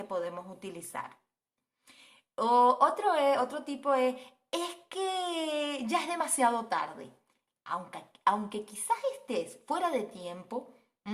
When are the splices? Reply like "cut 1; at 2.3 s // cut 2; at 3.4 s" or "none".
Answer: none